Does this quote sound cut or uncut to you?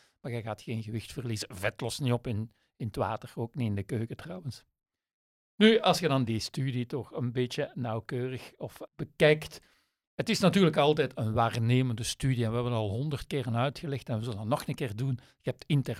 cut